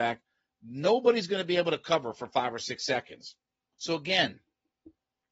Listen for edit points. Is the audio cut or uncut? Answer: cut